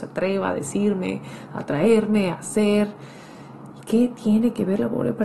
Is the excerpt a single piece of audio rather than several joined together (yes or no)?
yes